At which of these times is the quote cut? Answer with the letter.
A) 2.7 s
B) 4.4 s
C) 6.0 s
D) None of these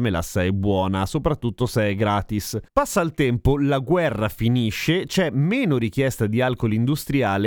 A